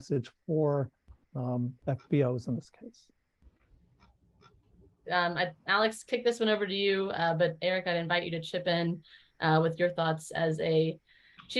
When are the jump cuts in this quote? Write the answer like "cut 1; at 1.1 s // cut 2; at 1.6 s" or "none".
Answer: cut 1; at 5.0 s